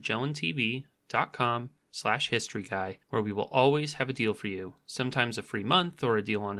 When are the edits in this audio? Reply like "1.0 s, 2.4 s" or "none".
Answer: 3.0 s